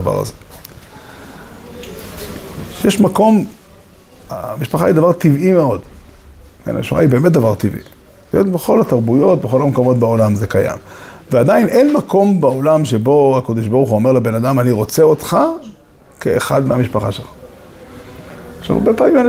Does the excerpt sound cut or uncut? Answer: uncut